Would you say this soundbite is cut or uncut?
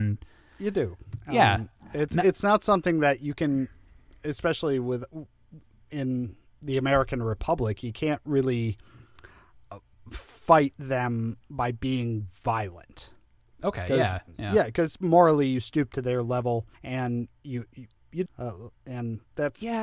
cut